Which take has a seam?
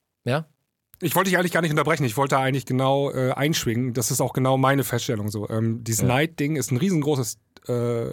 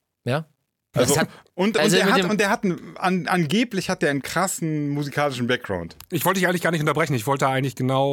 second; 2 cuts; at 0.9 s, 6.0 s

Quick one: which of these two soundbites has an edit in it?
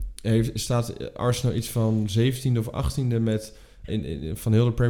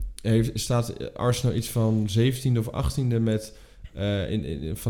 first; 1 cut; at 3.9 s

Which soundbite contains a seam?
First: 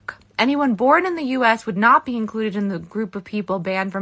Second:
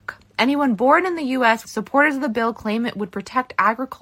second; 1 cut; at 1.6 s

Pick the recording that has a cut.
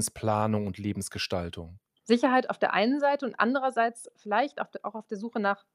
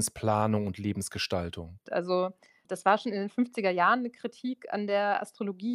second; 1 cut; at 1.9 s

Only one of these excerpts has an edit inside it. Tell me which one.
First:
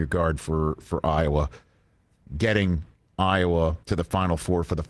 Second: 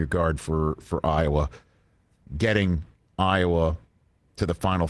first; 1 cut; at 3.8 s

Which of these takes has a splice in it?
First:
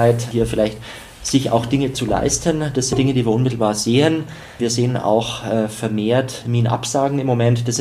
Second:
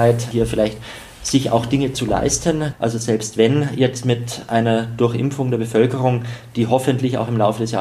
second; 1 cut; at 2.7 s

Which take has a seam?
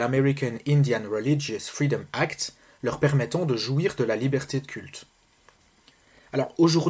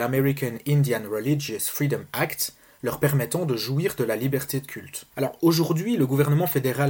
second; 1 cut; at 5.1 s

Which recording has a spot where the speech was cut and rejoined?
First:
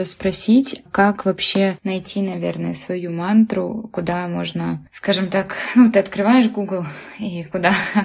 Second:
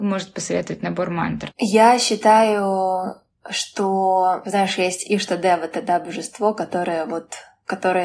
second; 1 cut; at 1.5 s

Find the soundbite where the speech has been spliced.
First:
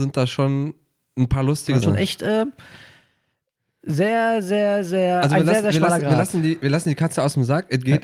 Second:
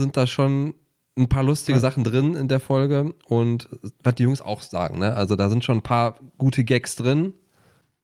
first; 1 cut; at 1.8 s

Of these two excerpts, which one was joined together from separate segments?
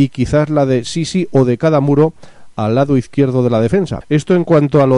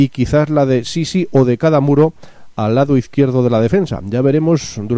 first; 1 cut; at 4.0 s

